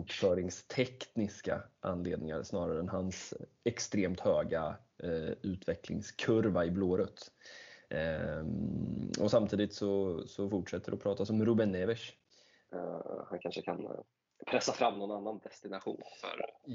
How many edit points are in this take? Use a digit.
1